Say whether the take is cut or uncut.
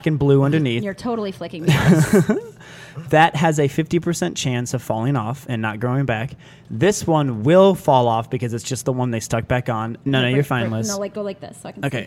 cut